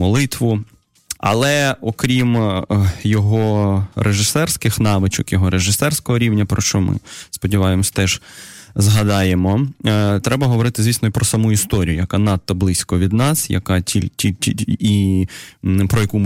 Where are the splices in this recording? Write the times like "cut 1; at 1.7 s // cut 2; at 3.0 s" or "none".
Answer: cut 1; at 1.2 s